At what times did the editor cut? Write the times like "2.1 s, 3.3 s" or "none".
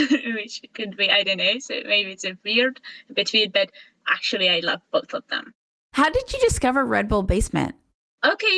none